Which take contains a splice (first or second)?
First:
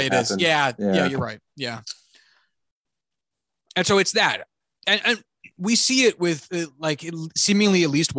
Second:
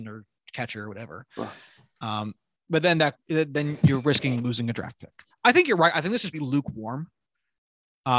second